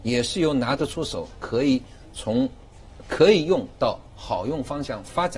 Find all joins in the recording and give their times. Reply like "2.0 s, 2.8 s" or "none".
none